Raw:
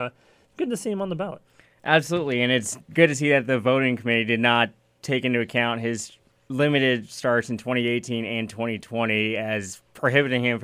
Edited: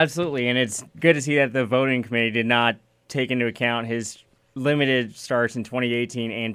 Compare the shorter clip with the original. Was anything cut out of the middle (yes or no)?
no